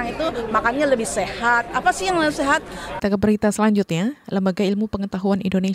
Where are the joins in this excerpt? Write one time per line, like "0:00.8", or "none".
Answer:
0:03.0